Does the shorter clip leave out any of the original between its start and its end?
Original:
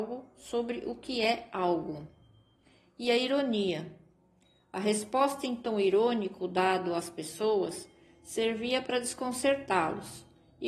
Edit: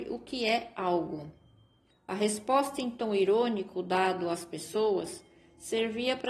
yes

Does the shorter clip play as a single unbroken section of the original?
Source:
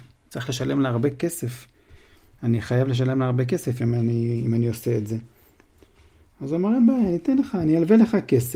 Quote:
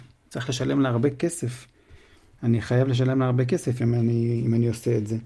yes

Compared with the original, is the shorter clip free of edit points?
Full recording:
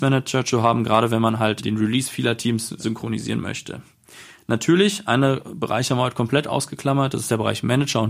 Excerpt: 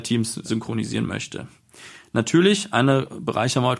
yes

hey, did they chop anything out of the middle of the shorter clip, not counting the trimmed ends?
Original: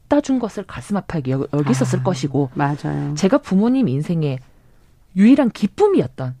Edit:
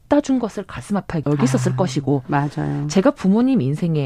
yes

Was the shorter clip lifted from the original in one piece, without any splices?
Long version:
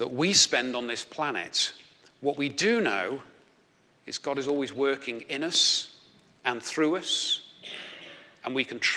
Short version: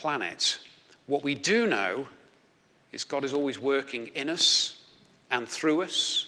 yes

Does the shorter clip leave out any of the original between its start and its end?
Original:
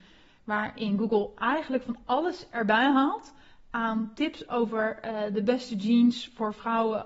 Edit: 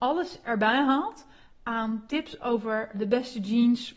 yes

